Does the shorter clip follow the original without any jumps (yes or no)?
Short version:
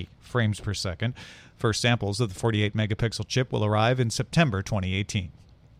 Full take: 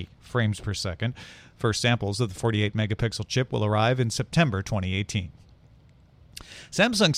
yes